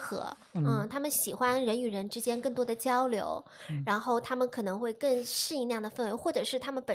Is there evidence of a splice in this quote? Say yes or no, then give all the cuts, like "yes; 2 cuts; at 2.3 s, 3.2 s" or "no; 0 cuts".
no; 0 cuts